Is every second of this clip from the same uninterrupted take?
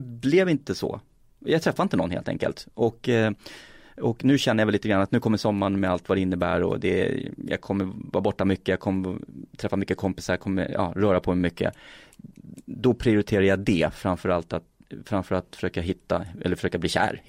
yes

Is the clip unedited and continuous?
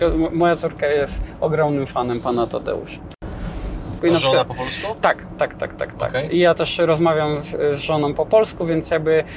no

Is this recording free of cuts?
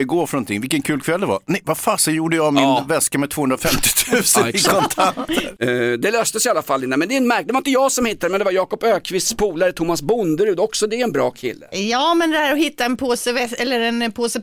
yes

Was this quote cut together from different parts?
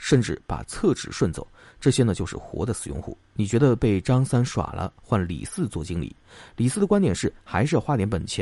yes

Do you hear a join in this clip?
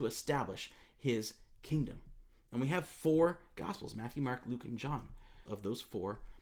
yes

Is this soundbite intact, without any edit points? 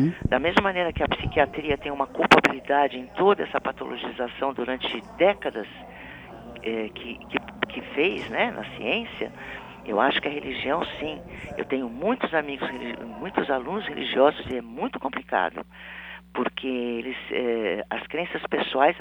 yes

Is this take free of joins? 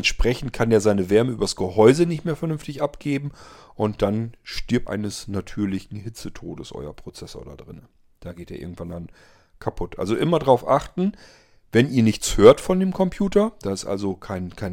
no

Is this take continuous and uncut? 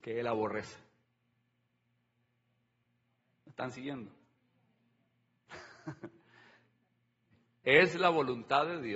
yes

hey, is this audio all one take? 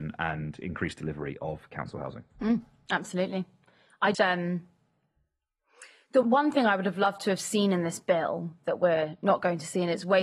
no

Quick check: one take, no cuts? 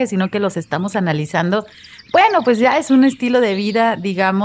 yes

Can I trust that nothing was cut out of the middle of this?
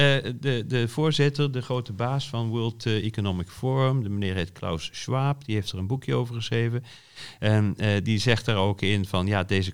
yes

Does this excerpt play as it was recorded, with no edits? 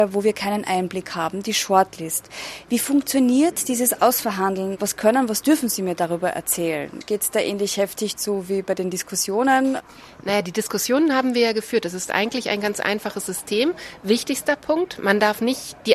yes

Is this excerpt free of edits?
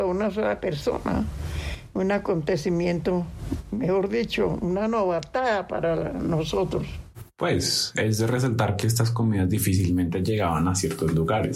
no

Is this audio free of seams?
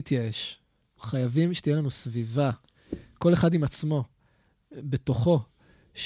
no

